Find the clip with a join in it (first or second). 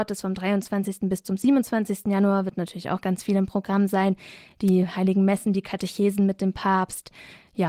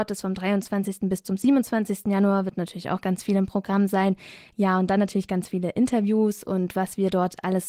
second